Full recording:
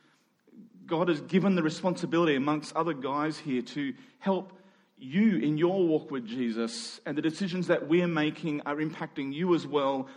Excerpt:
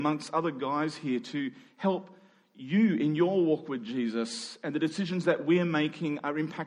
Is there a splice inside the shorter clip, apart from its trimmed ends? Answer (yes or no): no